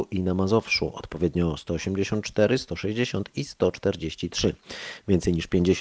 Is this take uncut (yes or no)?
yes